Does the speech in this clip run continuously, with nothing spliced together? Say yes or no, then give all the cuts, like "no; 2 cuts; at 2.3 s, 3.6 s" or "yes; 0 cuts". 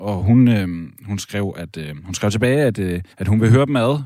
no; 1 cut; at 3.1 s